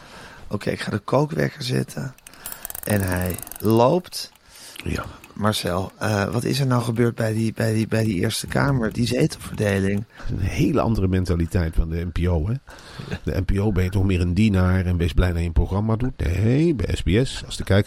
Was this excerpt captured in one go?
no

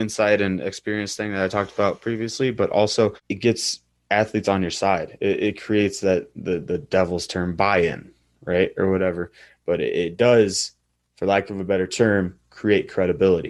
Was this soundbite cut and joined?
no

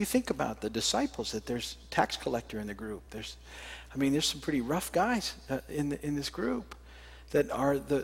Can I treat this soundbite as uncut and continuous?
yes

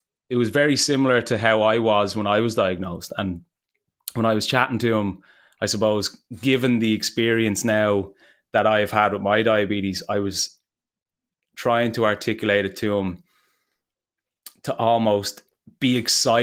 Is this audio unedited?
yes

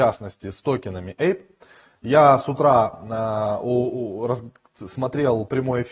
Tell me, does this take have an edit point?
no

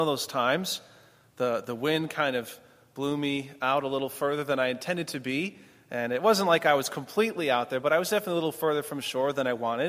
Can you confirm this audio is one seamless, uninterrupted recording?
yes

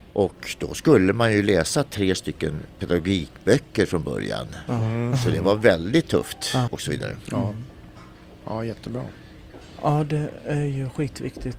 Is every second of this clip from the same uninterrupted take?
no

